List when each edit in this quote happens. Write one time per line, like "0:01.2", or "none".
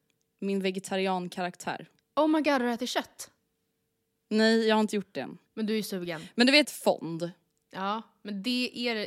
0:06.6